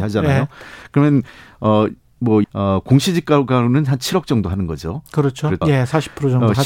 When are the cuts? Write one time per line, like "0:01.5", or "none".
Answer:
0:02.4
0:05.6